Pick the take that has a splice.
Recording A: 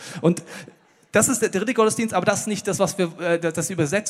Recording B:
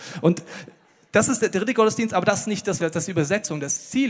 B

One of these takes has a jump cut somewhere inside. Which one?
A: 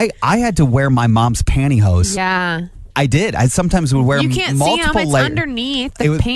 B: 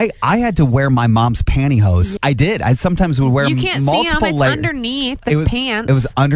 B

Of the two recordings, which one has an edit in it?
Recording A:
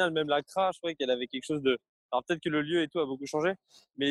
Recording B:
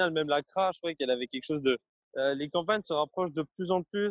B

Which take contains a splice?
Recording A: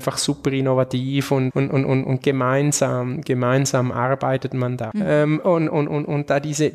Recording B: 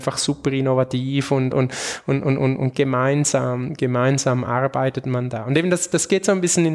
A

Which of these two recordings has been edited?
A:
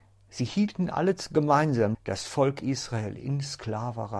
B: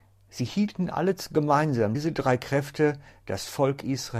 A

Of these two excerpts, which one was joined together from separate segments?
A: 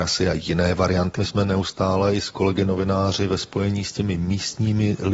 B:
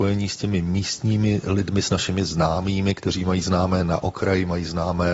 A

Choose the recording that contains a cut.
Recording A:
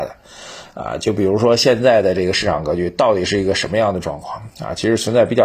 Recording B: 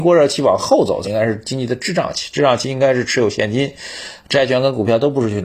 B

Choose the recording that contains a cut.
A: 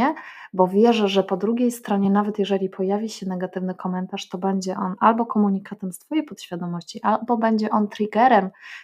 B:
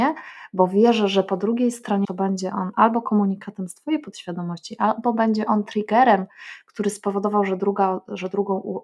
B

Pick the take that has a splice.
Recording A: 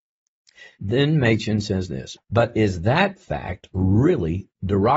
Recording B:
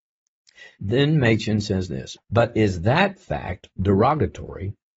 B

